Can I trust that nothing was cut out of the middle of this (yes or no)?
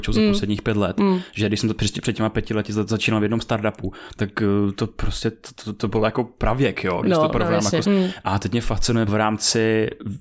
no